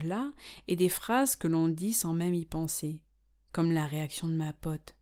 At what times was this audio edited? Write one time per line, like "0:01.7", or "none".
none